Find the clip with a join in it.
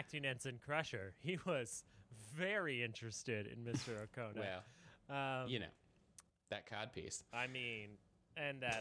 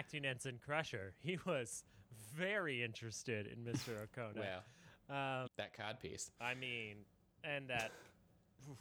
second; 1 cut; at 5.5 s

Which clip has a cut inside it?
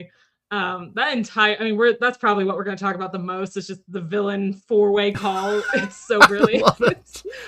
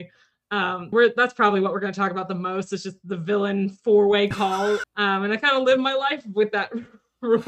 second; 2 cuts; at 0.9 s, 4.8 s

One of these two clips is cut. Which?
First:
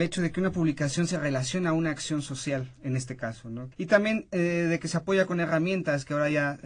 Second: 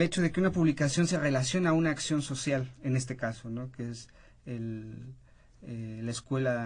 first; 1 cut; at 3.7 s

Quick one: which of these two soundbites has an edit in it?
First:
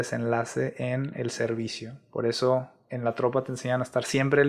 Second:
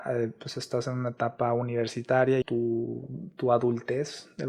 second; 1 cut; at 2.4 s

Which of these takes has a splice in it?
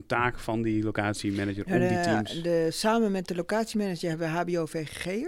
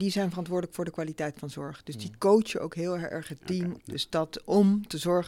second; 1 cut; at 3.8 s

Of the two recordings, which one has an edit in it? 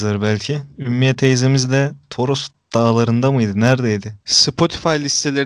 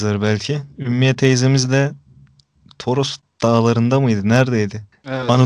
first; 2 cuts; at 2.0 s, 4.2 s

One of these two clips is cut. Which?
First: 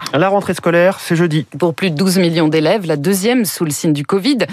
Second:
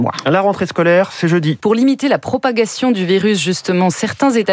second; 1 cut; at 1.6 s

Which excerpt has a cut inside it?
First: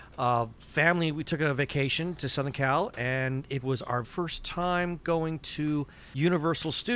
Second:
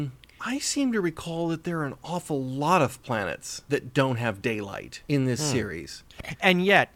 first; 1 cut; at 4.0 s

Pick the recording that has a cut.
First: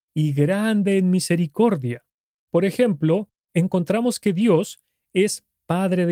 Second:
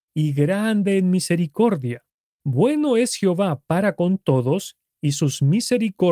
first; 2 cuts; at 2.3 s, 3.4 s

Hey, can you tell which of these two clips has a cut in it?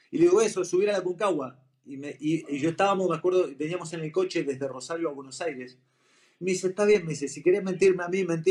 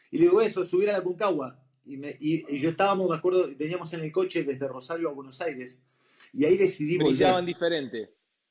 second; 1 cut; at 6.2 s

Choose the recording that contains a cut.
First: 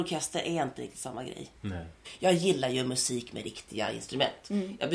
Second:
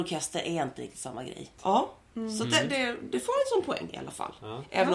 second; 1 cut; at 1.6 s

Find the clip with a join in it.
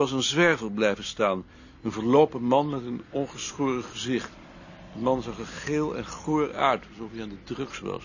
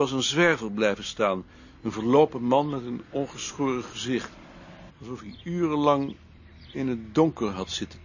second; 1 cut; at 4.9 s

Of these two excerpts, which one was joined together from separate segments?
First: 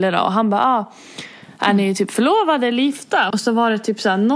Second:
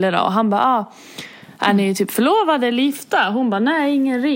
first; 1 cut; at 3.3 s

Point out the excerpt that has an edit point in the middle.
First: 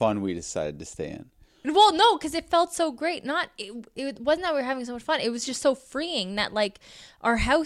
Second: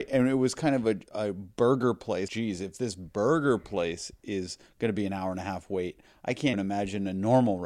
second; 2 cuts; at 2.3 s, 6.5 s

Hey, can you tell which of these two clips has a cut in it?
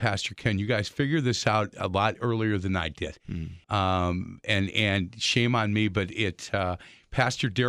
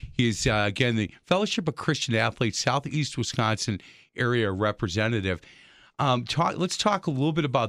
first; 1 cut; at 3.6 s

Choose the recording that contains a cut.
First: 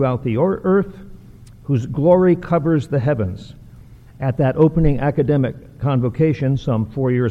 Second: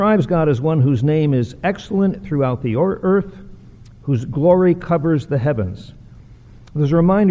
first; 1 cut; at 4.1 s

